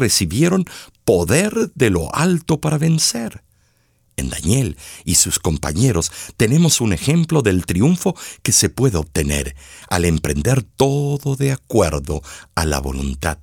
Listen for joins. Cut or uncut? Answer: uncut